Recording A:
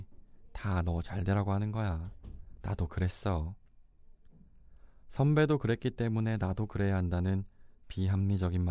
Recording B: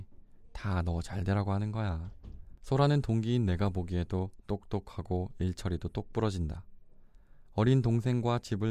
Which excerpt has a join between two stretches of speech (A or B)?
B